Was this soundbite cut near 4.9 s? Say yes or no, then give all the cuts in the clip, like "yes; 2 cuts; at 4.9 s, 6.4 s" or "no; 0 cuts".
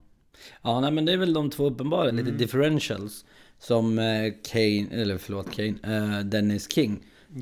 no; 1 cut; at 2.1 s